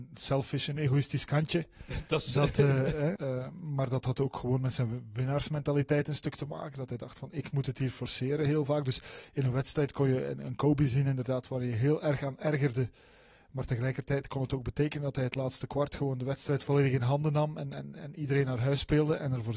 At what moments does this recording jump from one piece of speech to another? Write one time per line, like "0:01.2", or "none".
0:03.2